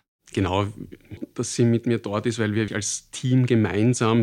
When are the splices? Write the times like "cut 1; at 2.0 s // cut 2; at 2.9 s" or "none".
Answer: cut 1; at 1.2 s // cut 2; at 2.7 s

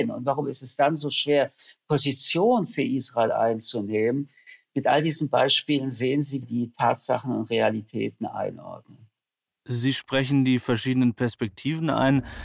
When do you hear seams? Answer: cut 1; at 6.4 s

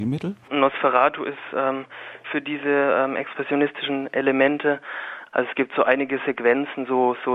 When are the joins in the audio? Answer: cut 1; at 2.2 s // cut 2; at 5.3 s

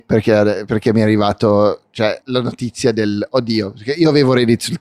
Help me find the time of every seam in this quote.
cut 1; at 2.2 s

